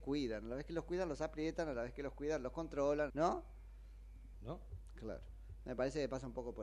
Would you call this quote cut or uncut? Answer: cut